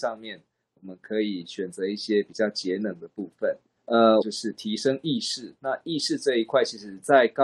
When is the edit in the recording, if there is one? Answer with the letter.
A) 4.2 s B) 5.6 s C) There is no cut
A